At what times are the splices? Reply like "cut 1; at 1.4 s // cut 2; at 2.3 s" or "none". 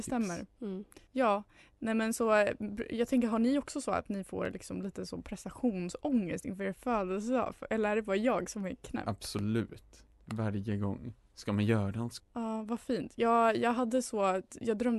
cut 1; at 1.1 s // cut 2; at 10.1 s // cut 3; at 12.2 s